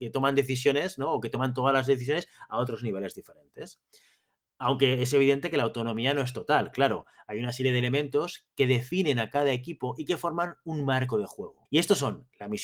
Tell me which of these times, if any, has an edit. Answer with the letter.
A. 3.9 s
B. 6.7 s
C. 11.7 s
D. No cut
C